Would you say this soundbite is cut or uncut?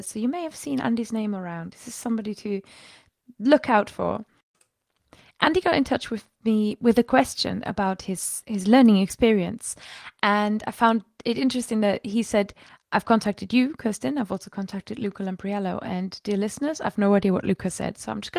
uncut